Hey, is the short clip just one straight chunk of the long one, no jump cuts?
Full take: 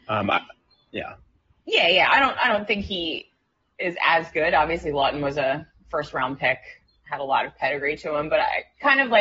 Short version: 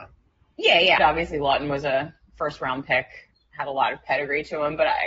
no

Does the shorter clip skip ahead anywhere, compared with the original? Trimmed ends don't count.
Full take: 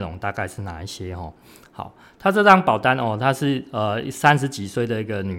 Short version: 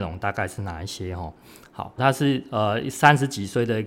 yes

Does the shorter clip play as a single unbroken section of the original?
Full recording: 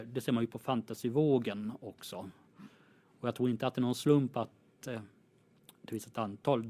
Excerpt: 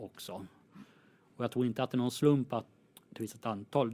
no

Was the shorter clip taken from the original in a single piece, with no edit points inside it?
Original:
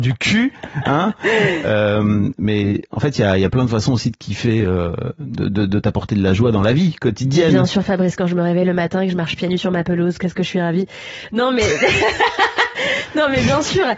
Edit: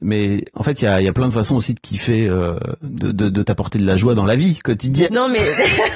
no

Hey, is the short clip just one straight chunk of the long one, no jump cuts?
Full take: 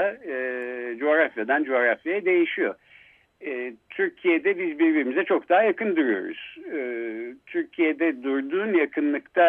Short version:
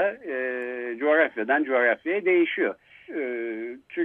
no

